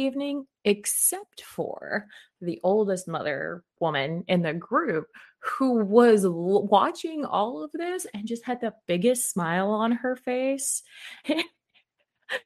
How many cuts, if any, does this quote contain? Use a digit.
1